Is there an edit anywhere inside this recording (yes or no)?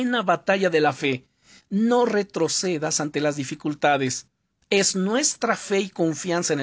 no